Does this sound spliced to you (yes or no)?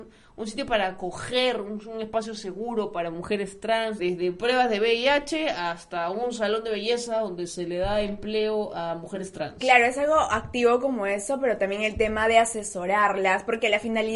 yes